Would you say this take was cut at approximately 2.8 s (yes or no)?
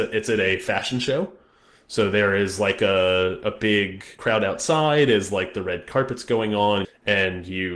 no